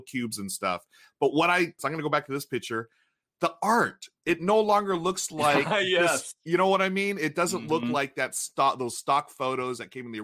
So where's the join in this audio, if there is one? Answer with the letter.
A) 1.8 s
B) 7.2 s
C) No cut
A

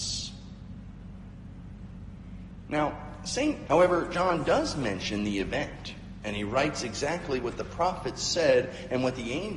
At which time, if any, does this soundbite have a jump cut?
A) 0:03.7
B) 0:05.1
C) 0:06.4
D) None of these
A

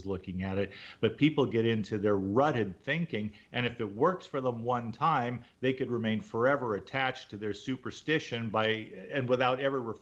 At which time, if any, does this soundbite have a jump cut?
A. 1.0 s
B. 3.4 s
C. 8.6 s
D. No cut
D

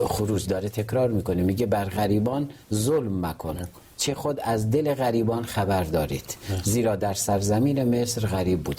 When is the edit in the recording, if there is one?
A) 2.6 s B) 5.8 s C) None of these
A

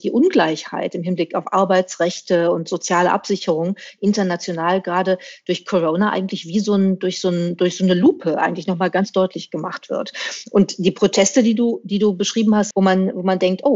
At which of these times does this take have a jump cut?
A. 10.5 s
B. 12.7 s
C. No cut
B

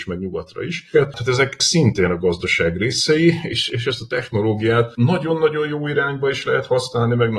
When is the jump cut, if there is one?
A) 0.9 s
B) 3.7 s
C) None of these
A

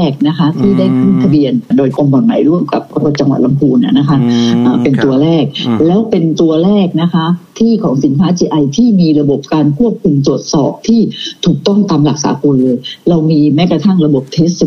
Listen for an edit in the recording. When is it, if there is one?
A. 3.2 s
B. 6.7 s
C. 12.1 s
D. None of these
A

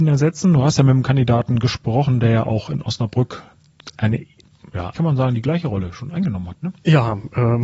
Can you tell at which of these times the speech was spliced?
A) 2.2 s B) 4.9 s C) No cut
B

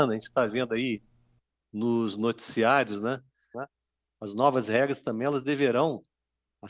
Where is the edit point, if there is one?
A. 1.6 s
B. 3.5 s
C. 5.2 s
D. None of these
B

